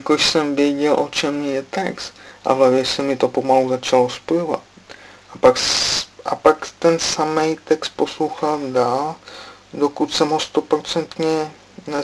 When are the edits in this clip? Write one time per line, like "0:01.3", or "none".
0:05.2